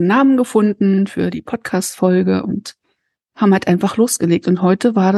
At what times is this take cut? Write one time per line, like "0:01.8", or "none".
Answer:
none